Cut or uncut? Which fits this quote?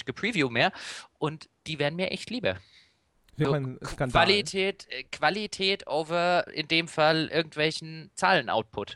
cut